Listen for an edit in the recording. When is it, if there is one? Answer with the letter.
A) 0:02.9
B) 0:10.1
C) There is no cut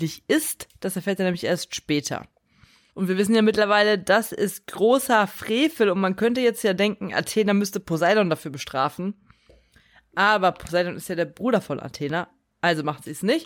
A